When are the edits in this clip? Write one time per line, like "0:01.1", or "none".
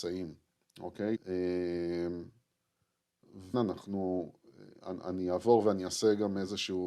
0:01.2
0:03.5